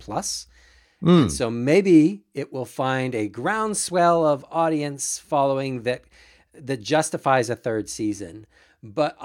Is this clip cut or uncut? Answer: uncut